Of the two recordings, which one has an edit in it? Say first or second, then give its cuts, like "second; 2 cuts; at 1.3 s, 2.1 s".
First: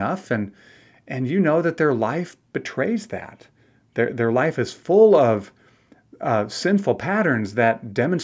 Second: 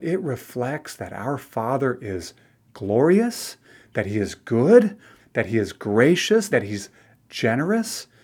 second; 2 cuts; at 5.2 s, 6.5 s